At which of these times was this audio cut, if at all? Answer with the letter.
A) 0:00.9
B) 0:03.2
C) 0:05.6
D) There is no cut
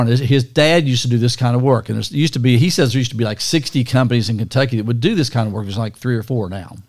D